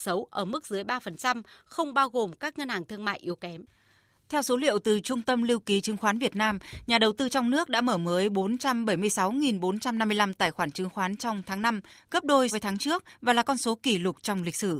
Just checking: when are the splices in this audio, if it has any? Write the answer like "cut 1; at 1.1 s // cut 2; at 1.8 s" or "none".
cut 1; at 12.5 s